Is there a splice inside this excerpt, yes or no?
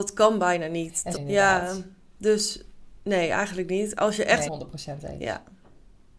yes